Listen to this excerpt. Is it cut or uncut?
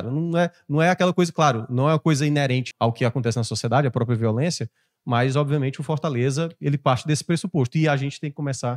cut